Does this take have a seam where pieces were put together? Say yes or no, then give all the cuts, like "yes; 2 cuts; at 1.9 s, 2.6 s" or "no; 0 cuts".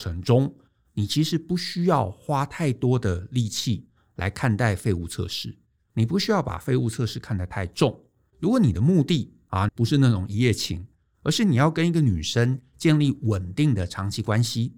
yes; 2 cuts; at 8.3 s, 9.7 s